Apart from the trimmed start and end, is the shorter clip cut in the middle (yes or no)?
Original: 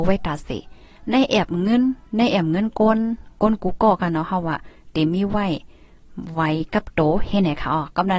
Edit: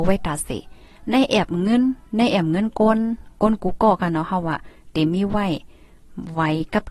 no